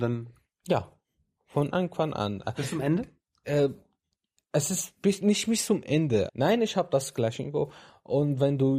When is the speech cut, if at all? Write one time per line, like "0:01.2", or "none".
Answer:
0:06.3